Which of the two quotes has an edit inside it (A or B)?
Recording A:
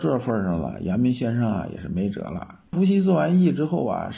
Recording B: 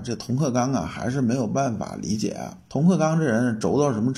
A